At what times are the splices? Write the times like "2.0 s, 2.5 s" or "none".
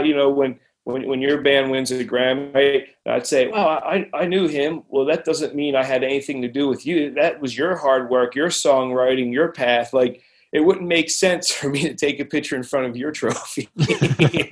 none